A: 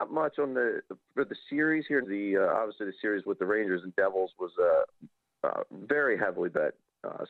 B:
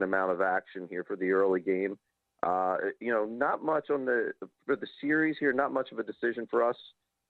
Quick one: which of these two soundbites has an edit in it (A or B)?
A